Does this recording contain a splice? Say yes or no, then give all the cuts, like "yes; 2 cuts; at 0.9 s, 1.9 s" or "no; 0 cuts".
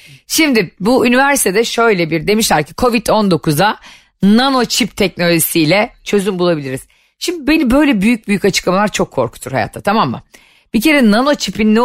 no; 0 cuts